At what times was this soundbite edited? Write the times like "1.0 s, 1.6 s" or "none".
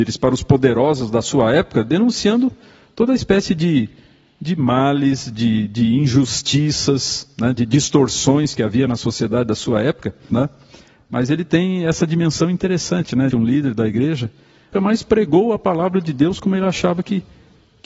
10.3 s, 13.3 s, 14.7 s